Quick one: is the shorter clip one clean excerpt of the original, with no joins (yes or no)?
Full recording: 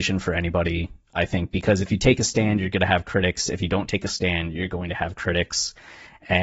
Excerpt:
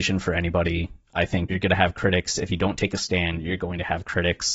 no